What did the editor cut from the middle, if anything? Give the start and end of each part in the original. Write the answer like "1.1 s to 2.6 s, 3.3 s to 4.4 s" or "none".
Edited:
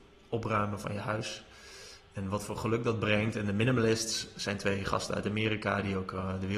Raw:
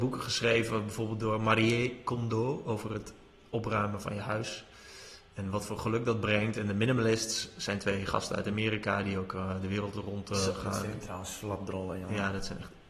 none